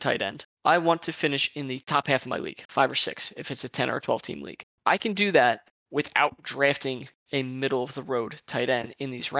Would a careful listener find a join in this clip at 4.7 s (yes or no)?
no